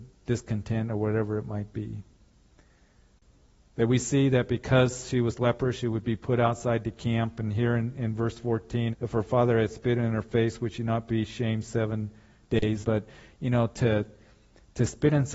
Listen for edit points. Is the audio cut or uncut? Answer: cut